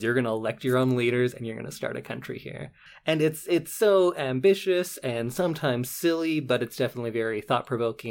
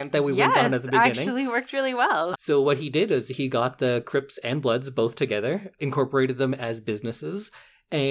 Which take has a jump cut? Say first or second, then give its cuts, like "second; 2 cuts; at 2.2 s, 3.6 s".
second; 2 cuts; at 2.3 s, 5.8 s